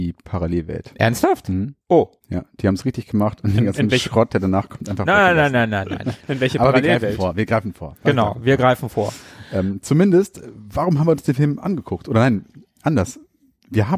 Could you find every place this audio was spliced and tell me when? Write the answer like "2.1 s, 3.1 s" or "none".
1.8 s